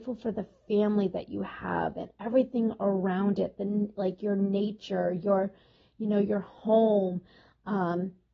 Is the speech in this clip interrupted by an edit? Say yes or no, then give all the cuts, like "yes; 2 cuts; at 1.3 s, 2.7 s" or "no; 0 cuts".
no; 0 cuts